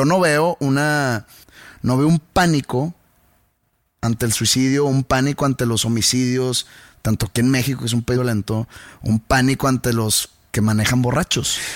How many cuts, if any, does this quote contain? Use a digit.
1